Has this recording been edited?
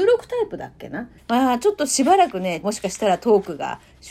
yes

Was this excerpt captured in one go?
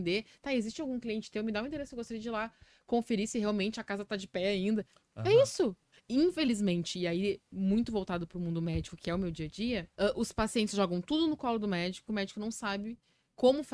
no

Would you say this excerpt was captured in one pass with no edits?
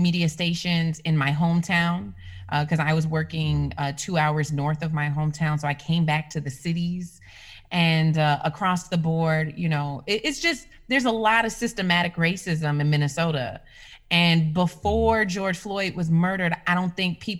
yes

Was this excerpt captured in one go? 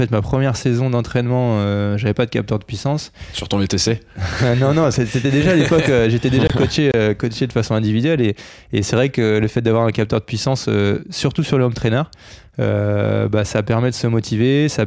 yes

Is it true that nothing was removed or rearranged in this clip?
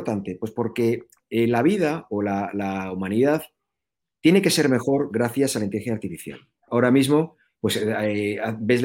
no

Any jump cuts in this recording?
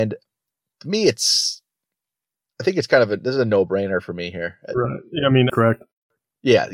yes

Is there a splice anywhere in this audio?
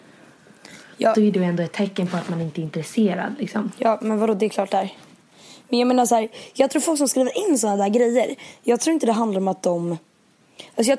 no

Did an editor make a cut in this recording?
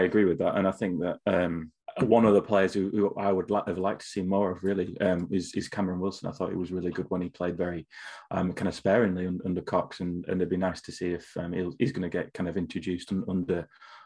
no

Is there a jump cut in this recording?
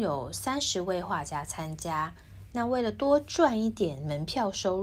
yes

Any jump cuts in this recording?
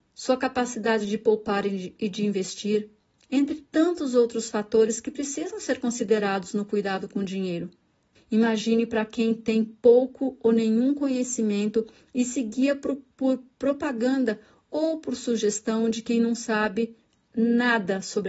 yes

